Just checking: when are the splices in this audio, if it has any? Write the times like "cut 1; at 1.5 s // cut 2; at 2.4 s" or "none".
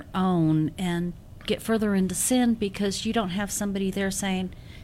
none